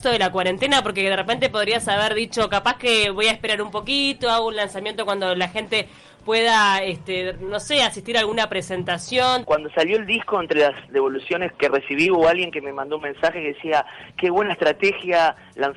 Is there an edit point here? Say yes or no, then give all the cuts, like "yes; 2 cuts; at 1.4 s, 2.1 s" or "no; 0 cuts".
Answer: yes; 2 cuts; at 9.4 s, 11.5 s